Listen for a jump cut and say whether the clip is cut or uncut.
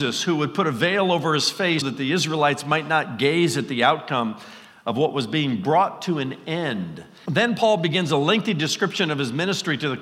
cut